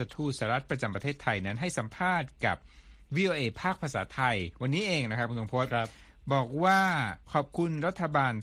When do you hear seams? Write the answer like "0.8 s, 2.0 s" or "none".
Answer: 7.2 s